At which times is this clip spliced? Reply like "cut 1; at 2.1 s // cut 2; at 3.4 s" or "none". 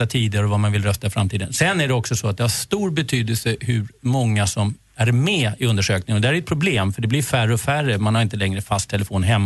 none

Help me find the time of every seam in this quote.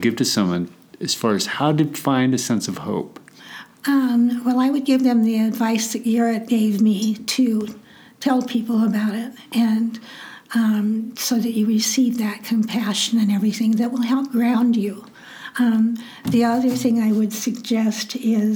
none

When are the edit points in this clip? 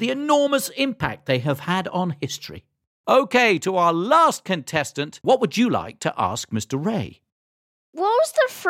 cut 1; at 5.2 s

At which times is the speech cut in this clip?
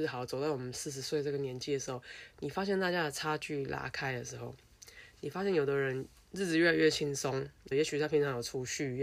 cut 1; at 7.7 s

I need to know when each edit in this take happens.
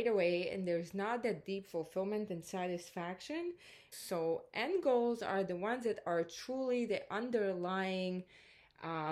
cut 1; at 3.9 s

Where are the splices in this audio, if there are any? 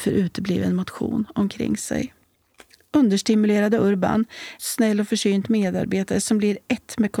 cut 1; at 4.6 s

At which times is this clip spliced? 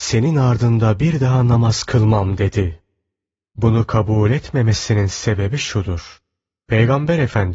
none

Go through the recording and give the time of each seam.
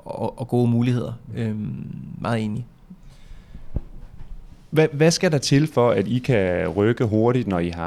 none

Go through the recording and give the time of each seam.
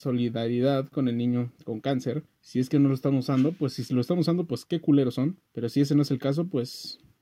cut 1; at 2.3 s // cut 2; at 5.5 s

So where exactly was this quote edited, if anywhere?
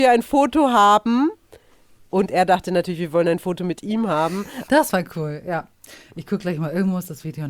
cut 1; at 4.7 s

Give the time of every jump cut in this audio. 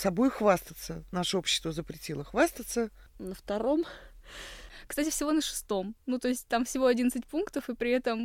cut 1; at 3.1 s

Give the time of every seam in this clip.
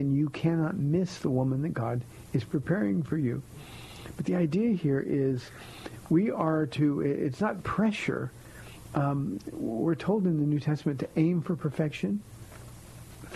none

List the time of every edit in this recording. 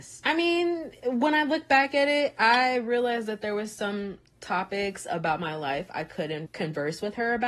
cut 1; at 6.5 s

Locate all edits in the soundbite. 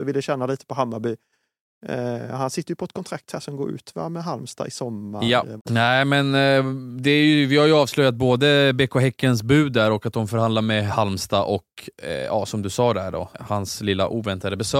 cut 1; at 5.6 s // cut 2; at 13.3 s

